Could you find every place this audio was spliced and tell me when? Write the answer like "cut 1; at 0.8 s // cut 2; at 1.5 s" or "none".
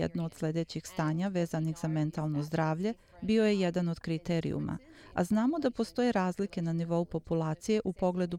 none